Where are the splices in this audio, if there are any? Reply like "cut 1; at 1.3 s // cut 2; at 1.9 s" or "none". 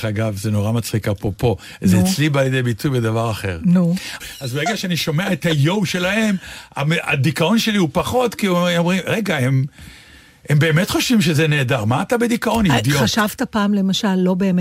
cut 1; at 4.2 s